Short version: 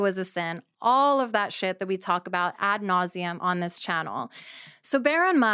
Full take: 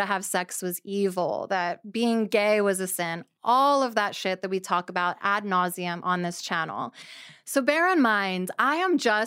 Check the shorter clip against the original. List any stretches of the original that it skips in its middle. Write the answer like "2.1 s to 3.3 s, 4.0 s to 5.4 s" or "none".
none